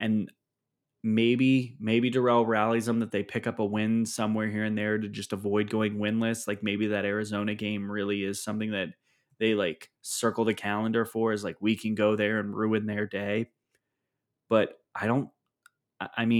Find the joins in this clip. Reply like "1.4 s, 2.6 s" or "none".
none